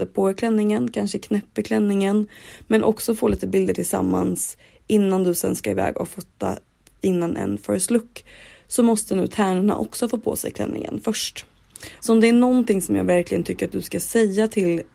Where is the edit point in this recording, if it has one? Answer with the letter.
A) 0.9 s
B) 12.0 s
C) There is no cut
B